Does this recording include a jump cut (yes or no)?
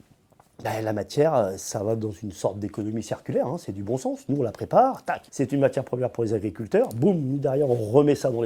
yes